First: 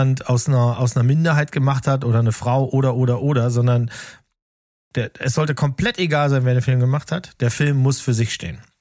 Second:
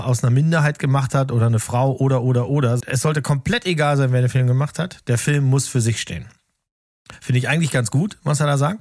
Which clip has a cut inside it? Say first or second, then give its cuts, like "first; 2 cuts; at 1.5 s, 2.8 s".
second; 1 cut; at 2.8 s